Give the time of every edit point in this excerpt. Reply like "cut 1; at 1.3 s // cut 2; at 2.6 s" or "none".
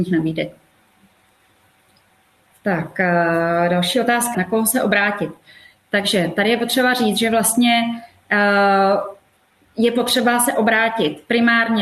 cut 1; at 4.3 s

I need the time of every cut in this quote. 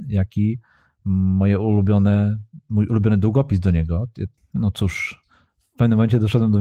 cut 1; at 4.4 s

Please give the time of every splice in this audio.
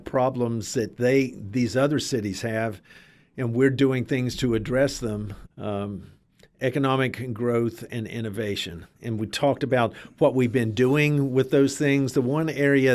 cut 1; at 5.4 s

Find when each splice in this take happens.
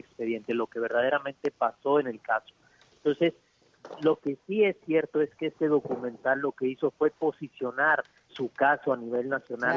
cut 1; at 8.3 s

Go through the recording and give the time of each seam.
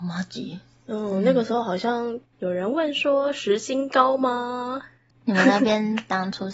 cut 1; at 2.3 s

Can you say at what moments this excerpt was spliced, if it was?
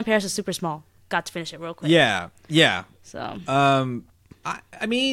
none

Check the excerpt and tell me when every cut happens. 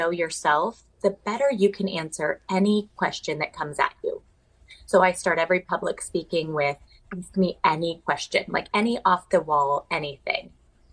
none

